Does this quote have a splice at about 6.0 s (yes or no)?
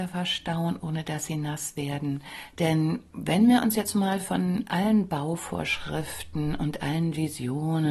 no